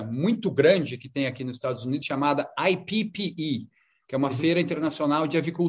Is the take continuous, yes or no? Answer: yes